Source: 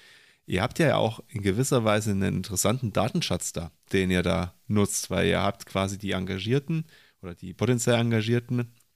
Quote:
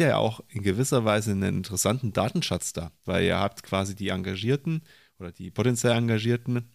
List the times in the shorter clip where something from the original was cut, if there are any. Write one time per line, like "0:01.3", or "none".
0:03.0